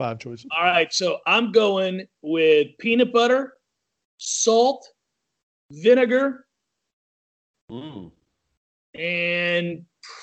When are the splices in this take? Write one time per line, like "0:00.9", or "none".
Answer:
0:07.5